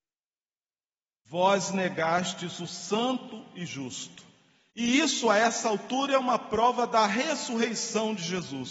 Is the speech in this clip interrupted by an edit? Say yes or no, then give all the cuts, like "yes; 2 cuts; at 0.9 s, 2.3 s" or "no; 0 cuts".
yes; 1 cut; at 4.7 s